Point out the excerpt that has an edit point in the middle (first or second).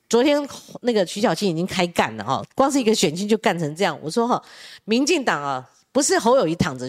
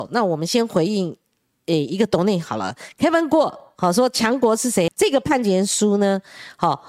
second